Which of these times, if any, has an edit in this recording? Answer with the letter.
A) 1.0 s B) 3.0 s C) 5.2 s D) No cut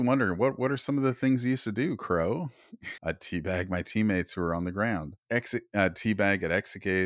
B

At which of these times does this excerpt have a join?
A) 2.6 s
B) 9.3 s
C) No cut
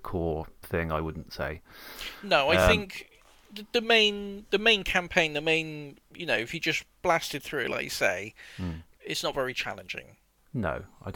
C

